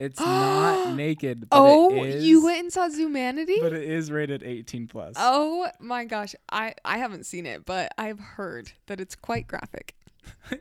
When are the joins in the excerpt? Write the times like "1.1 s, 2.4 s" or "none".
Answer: none

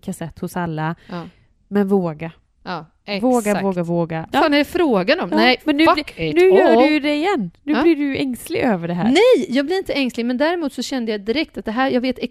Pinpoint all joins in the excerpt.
4.3 s

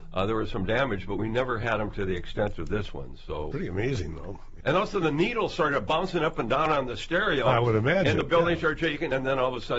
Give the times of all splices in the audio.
3.5 s, 4.6 s

